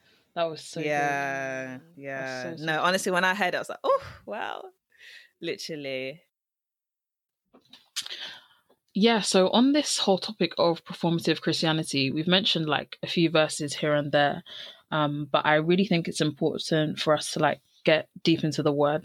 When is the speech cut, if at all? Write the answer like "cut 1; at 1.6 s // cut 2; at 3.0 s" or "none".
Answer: none